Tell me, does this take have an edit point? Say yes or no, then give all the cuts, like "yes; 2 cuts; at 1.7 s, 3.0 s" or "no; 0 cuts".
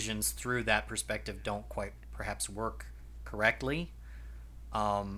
no; 0 cuts